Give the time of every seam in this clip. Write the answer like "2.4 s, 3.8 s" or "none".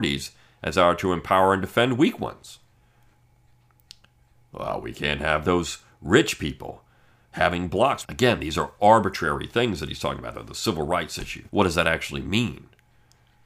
8.0 s, 11.5 s